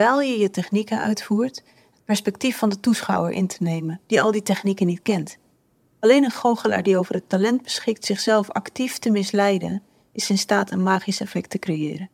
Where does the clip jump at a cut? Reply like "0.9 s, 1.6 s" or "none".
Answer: 5.9 s